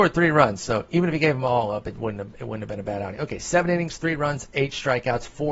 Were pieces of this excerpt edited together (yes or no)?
no